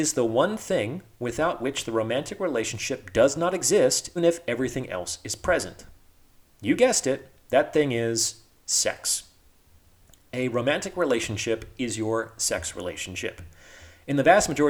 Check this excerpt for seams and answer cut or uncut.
cut